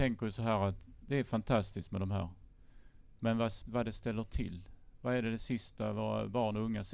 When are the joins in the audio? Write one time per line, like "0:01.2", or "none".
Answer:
0:03.6